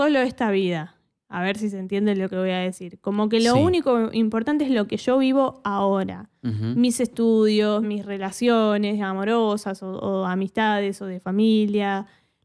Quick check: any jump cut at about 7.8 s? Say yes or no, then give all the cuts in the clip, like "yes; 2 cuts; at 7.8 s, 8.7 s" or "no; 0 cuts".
yes; 1 cut; at 7.8 s